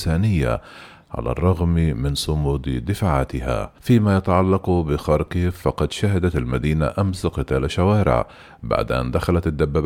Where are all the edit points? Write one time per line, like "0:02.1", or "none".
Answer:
0:03.8